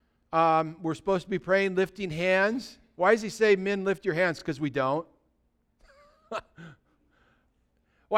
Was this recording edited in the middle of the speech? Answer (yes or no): no